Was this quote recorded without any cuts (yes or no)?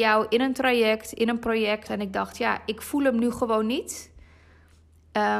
no